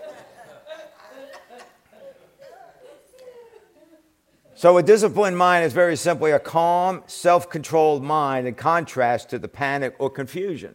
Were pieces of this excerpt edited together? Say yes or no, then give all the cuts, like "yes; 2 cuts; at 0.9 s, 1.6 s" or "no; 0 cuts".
no; 0 cuts